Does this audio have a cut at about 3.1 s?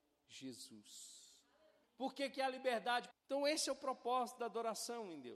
yes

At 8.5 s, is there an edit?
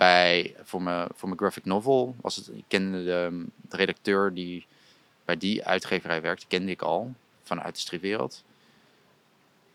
no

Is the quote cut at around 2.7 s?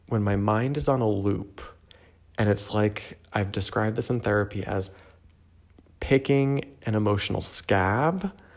no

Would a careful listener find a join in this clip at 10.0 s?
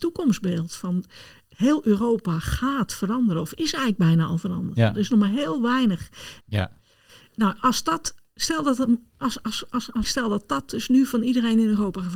yes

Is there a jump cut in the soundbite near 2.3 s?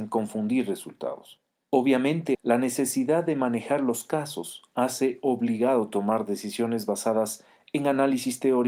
yes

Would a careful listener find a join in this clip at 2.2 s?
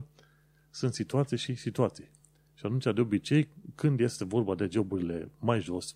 no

